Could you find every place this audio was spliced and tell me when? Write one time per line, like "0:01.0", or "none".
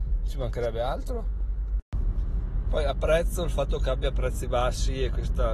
none